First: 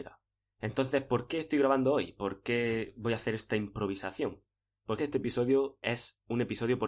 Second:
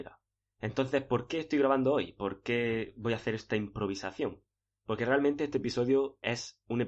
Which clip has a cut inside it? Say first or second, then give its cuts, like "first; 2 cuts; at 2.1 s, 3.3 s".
first; 1 cut; at 5.0 s